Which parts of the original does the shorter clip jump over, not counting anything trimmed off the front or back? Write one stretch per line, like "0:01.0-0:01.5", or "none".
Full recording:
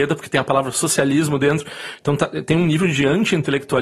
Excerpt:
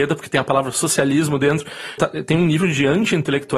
0:02.0-0:02.2

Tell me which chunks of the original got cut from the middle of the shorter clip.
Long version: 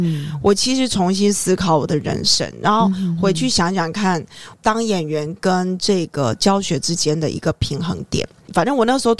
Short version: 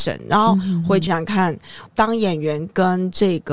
0:03.4-0:03.7

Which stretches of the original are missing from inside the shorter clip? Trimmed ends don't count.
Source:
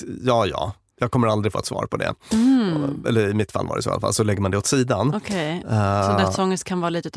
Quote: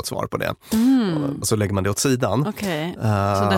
0:03.0-0:04.1

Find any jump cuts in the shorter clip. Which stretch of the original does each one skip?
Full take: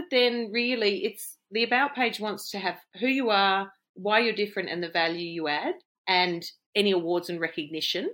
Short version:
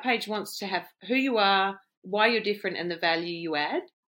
none

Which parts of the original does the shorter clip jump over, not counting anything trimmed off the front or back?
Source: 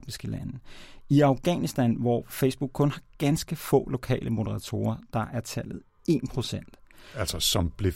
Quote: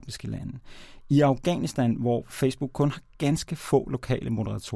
none

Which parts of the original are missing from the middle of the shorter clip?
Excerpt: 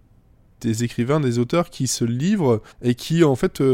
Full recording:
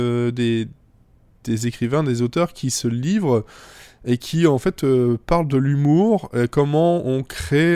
0:03.5-0:03.9

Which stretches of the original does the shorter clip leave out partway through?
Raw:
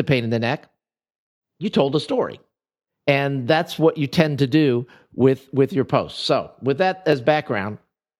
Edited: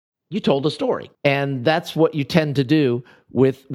0:02.4-0:03.0

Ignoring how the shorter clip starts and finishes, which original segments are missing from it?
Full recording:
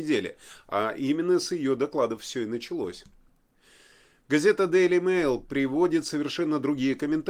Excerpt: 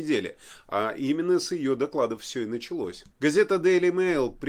0:03.1-0:04.2

